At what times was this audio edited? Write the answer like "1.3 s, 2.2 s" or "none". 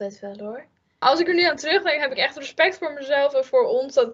1.0 s